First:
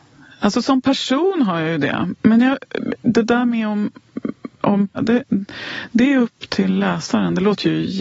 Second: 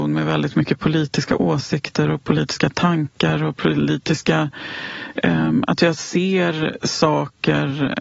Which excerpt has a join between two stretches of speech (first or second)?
first